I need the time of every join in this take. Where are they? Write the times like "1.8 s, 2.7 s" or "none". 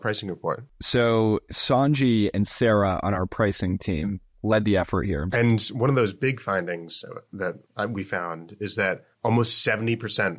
5.3 s, 9.1 s